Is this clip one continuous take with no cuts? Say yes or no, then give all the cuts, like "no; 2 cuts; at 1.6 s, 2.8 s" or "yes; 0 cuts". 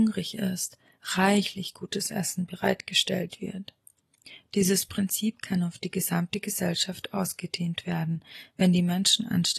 yes; 0 cuts